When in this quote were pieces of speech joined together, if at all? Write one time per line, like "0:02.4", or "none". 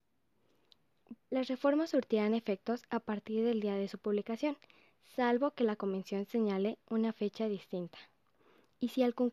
0:01.2